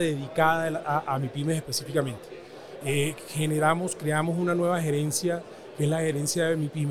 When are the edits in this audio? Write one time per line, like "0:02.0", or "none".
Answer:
0:02.8